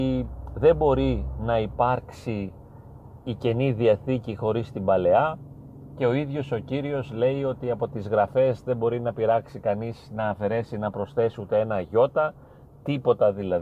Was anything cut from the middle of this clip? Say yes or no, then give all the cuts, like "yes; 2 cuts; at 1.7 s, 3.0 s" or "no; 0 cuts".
no; 0 cuts